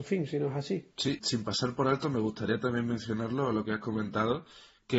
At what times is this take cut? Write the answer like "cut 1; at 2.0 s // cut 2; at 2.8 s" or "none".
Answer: cut 1; at 1.2 s